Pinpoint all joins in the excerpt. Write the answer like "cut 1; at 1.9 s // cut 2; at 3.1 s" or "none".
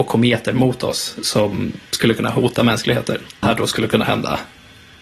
cut 1; at 3.4 s